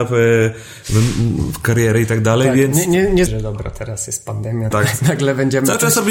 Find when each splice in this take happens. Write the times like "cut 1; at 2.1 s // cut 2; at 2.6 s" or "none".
cut 1; at 3.3 s // cut 2; at 4.7 s